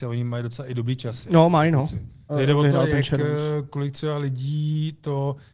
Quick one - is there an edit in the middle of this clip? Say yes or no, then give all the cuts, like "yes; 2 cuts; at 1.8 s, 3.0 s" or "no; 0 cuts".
yes; 1 cut; at 2.3 s